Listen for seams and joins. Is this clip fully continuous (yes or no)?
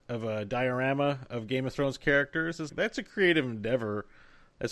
no